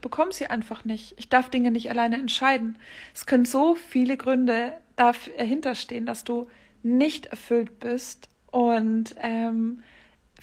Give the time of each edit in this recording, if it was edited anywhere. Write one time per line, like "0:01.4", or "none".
none